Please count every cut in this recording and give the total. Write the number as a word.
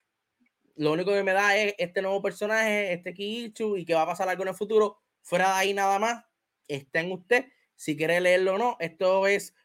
zero